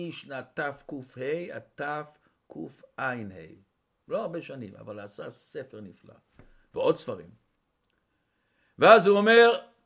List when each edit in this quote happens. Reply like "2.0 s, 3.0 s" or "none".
none